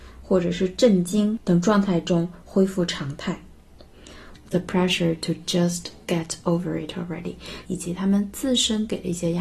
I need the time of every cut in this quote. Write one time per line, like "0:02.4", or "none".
0:04.3
0:07.6